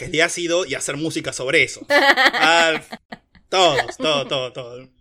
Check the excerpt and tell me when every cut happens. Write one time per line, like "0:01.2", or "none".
0:01.9
0:04.0